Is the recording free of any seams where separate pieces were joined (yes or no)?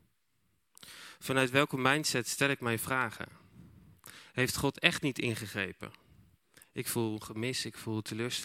no